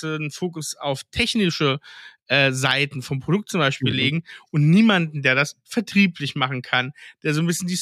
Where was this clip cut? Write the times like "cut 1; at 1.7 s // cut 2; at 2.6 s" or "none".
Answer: none